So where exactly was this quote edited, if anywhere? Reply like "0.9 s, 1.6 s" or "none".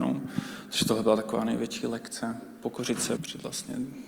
3.2 s